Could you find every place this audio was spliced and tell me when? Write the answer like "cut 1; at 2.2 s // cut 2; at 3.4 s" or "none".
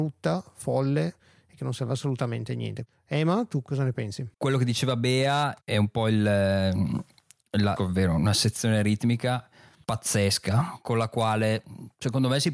cut 1; at 4.3 s // cut 2; at 7.8 s